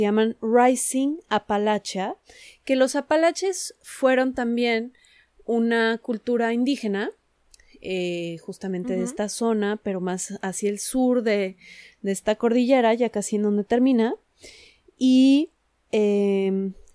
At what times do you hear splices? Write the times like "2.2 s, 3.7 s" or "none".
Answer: none